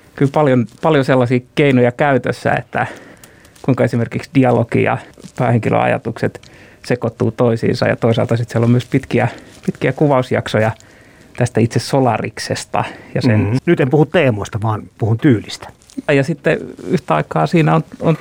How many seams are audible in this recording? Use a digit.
2